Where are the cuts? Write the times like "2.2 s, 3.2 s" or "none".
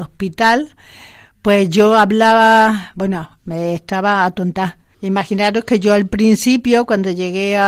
3.4 s, 4.9 s